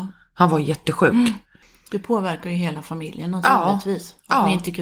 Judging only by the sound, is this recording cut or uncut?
uncut